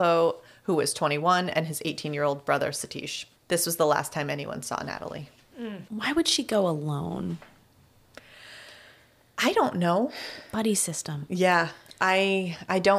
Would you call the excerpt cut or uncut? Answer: cut